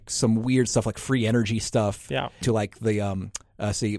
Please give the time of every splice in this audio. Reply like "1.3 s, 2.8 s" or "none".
2.4 s